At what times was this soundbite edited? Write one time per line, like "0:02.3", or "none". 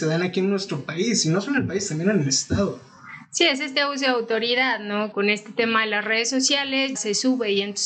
0:05.1
0:06.9